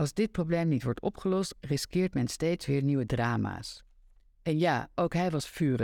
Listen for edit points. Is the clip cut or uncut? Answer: uncut